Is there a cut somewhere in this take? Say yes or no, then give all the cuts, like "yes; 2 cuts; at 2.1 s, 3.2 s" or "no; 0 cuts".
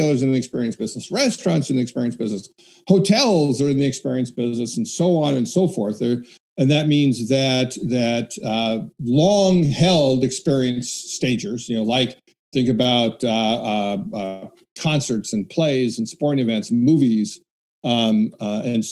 yes; 1 cut; at 6.4 s